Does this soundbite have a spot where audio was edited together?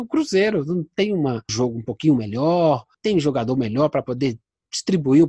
yes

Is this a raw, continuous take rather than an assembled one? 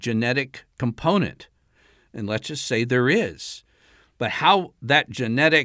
yes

